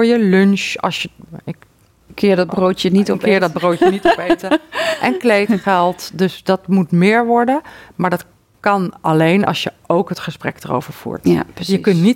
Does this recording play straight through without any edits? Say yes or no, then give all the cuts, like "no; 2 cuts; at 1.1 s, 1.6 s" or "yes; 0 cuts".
yes; 0 cuts